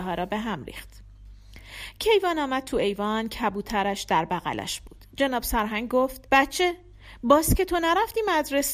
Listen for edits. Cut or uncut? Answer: cut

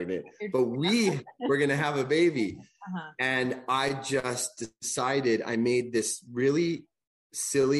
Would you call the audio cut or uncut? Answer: uncut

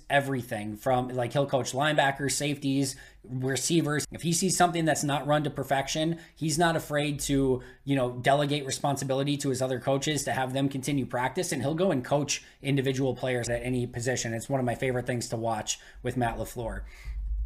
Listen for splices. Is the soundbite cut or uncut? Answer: cut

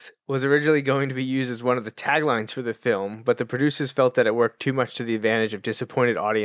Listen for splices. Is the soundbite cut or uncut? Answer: uncut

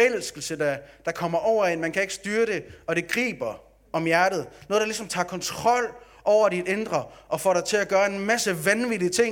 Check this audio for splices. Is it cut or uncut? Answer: uncut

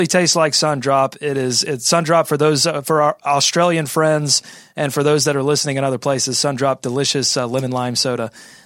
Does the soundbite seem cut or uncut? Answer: uncut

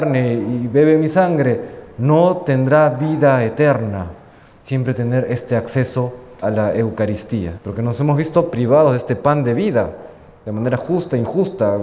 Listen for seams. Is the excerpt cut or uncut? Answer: cut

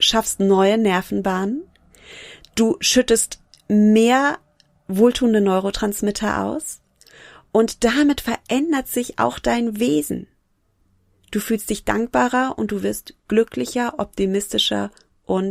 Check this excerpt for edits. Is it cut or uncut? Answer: uncut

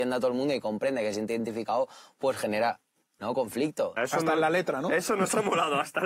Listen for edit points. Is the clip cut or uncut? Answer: cut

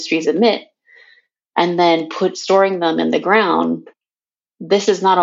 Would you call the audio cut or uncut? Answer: uncut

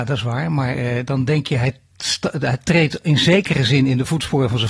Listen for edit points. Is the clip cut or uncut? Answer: uncut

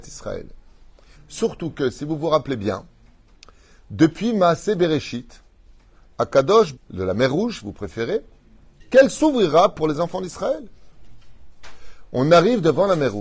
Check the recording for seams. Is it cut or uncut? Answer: cut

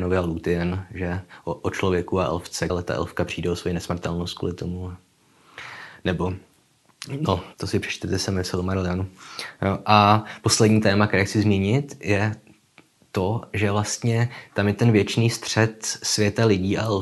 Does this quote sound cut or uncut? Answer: cut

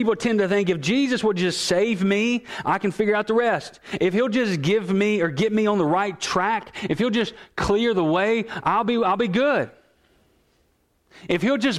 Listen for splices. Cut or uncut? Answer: uncut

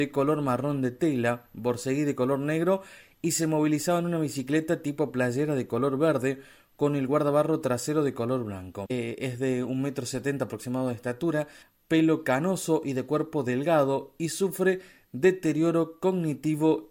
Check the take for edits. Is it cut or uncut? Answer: uncut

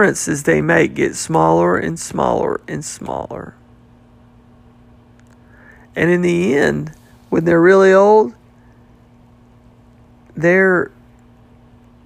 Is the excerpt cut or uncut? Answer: uncut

